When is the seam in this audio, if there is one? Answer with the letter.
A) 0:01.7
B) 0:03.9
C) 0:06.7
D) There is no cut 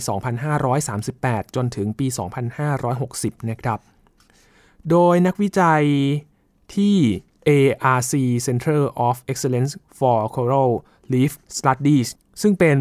D